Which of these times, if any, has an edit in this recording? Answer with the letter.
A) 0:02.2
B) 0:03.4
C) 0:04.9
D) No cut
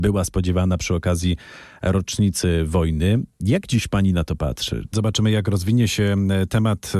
C